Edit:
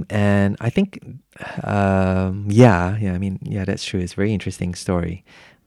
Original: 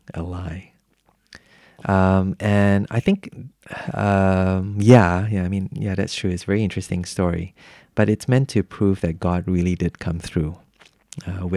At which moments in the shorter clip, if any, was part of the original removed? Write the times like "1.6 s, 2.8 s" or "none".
none